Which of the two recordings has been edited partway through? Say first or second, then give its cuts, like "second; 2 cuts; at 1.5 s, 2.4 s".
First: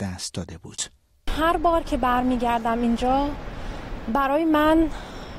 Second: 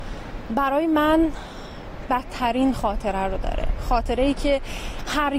second; 1 cut; at 2.1 s